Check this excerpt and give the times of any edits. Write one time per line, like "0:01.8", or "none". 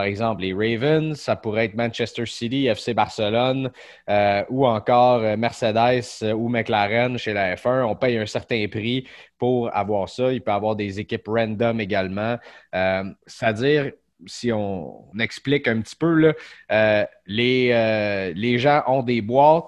0:07.2
0:13.2
0:15.1